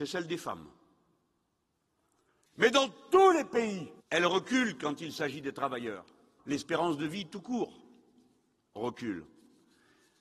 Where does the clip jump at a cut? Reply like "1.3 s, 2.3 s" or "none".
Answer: 2.5 s, 4.0 s, 6.4 s